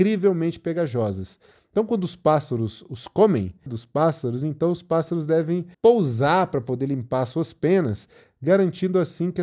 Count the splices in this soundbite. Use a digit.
2